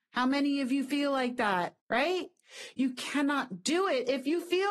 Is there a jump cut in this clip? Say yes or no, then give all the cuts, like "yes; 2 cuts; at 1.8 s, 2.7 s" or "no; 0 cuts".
yes; 1 cut; at 1.8 s